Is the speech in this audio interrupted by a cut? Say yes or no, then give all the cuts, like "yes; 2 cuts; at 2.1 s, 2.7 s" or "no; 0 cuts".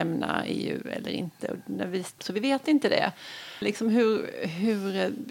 yes; 2 cuts; at 2.2 s, 3.6 s